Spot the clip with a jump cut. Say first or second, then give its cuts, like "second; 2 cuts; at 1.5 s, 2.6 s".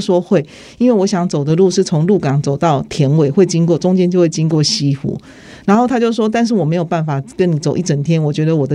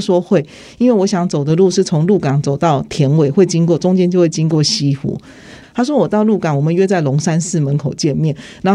second; 1 cut; at 5.6 s